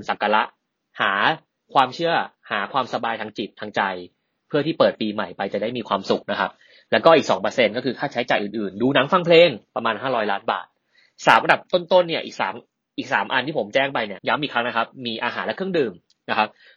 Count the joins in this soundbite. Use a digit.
1